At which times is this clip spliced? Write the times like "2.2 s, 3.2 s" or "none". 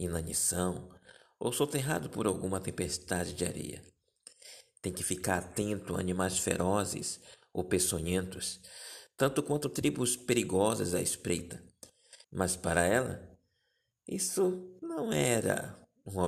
12.2 s